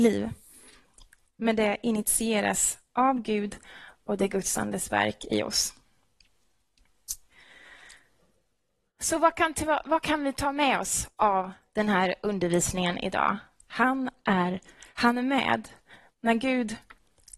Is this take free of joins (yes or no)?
no